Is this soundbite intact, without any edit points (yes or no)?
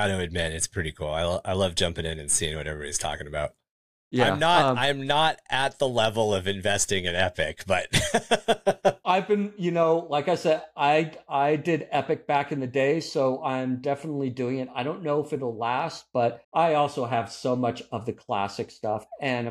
no